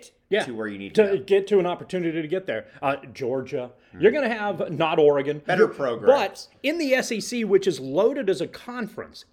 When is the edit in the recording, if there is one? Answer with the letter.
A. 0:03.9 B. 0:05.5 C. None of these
B